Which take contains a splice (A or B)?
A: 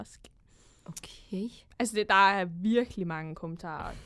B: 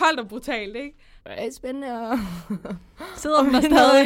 B